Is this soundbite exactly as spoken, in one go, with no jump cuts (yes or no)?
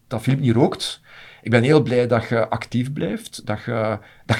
yes